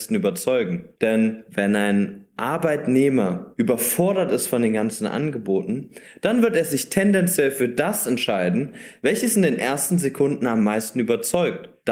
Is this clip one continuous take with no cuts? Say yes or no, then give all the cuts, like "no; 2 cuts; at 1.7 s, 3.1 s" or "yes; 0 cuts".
no; 1 cut; at 1.0 s